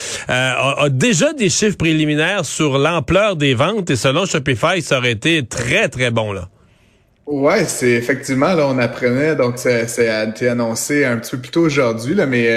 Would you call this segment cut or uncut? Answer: uncut